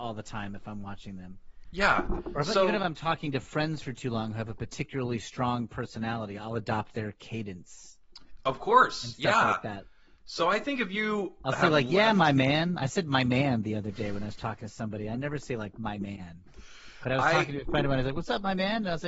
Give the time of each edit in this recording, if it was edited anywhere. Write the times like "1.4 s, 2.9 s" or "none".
none